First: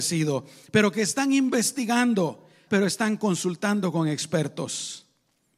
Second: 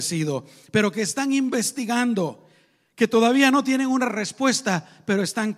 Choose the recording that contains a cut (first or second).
first